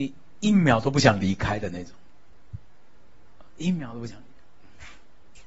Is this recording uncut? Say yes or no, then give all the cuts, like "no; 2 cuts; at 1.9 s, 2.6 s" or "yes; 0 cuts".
yes; 0 cuts